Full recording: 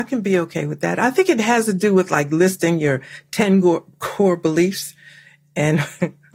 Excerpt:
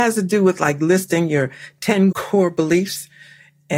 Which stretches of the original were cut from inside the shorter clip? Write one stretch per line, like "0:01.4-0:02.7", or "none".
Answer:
0:03.6-0:04.0